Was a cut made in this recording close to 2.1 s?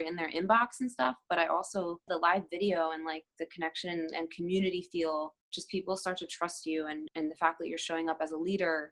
yes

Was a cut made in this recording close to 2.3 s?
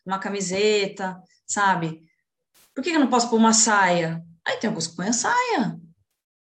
no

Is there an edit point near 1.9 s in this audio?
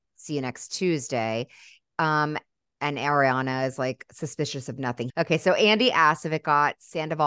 no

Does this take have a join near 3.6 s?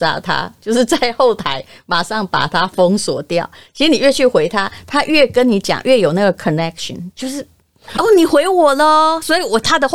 no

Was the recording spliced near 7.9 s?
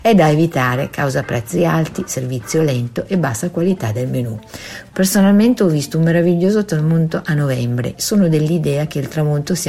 yes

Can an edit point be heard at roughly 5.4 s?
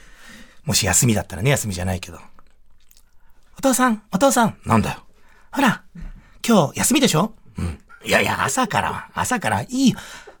no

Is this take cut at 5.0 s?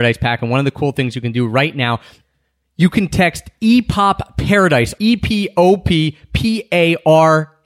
yes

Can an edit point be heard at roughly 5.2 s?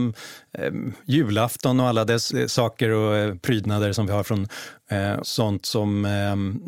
yes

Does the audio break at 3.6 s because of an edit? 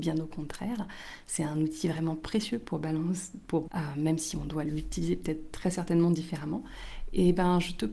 yes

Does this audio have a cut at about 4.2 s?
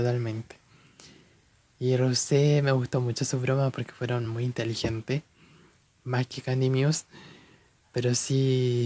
no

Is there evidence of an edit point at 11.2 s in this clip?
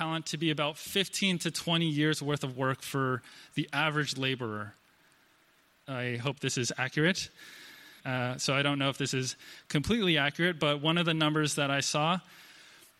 no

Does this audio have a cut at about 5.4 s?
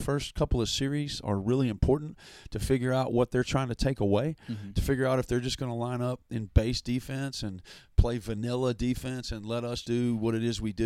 no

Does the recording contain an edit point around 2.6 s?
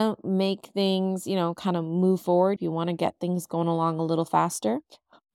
yes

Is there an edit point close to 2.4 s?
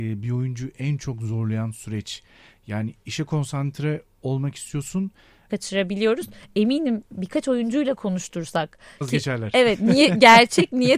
no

